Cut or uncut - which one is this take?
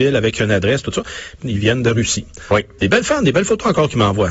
cut